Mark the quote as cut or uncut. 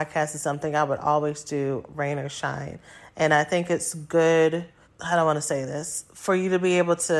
cut